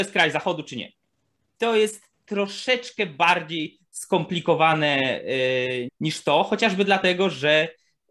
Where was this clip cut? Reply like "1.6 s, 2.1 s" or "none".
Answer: 5.9 s